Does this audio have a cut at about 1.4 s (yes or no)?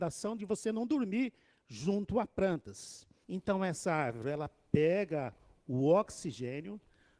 no